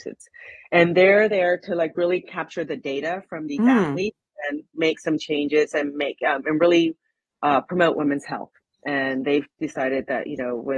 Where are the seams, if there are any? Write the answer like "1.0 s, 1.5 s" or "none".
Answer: none

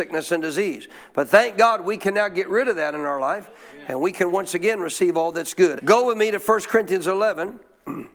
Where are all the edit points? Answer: 5.8 s

